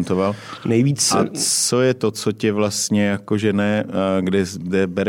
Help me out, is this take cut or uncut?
uncut